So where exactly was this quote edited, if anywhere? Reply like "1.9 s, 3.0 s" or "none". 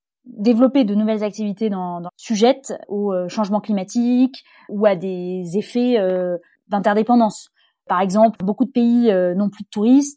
2.1 s, 8.3 s